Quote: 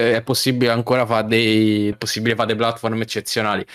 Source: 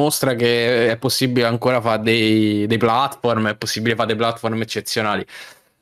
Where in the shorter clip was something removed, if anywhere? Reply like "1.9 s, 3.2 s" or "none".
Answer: 1.9 s